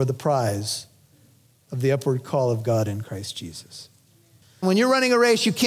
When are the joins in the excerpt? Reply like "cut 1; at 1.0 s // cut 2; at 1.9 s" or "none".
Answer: cut 1; at 4.6 s

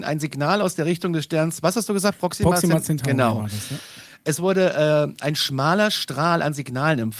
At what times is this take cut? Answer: none

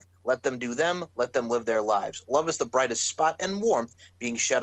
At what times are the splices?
none

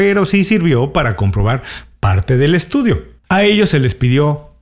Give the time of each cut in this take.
cut 1; at 3.2 s

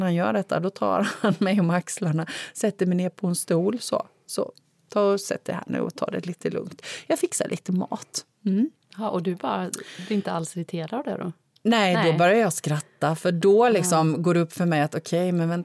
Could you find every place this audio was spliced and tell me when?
none

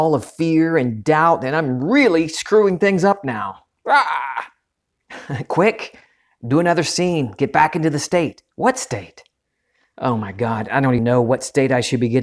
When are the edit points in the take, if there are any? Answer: cut 1; at 8.5 s // cut 2; at 11.0 s

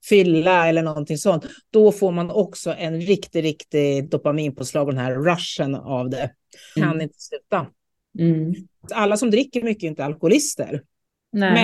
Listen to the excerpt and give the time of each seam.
cut 1; at 6.8 s // cut 2; at 8.9 s

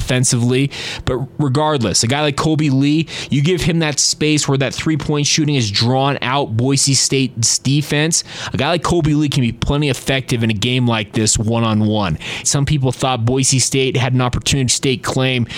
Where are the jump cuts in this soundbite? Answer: cut 1; at 12.4 s // cut 2; at 14.7 s

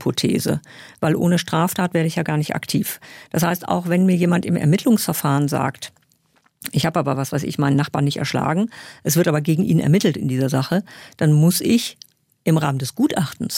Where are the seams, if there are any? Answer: none

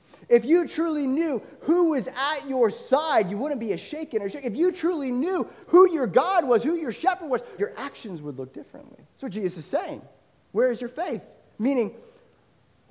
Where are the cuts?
cut 1; at 7.6 s // cut 2; at 9.1 s

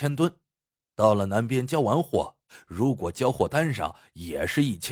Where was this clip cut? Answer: none

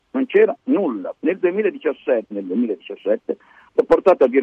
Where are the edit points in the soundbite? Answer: cut 1; at 1.2 s // cut 2; at 2.3 s

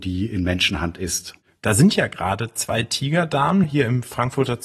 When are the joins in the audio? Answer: cut 1; at 1.6 s // cut 2; at 3.6 s

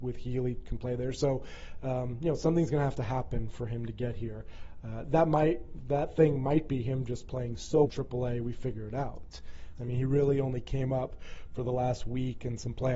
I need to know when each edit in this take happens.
cut 1; at 7.8 s // cut 2; at 9.8 s

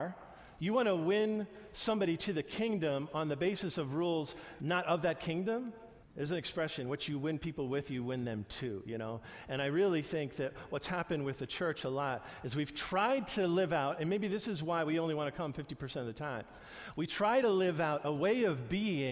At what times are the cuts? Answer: cut 1; at 6.0 s

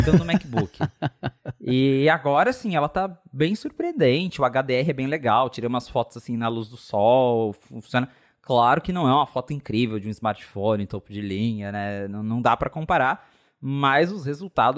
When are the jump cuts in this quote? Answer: none

